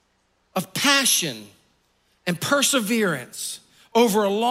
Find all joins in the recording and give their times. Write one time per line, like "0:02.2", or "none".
none